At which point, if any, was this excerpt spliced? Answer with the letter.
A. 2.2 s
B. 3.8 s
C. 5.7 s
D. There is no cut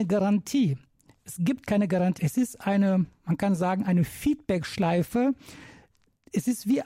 A